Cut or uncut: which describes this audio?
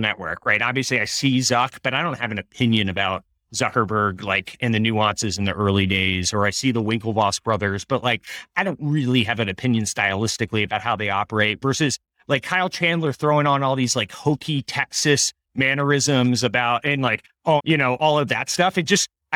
cut